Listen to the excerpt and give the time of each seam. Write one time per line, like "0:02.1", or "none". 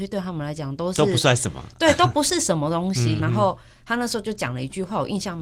0:03.2